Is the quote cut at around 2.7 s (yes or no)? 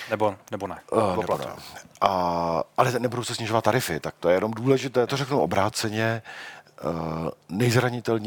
no